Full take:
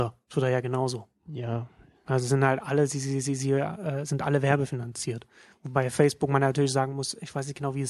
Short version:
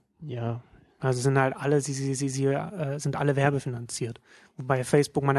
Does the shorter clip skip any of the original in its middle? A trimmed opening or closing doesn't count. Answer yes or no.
no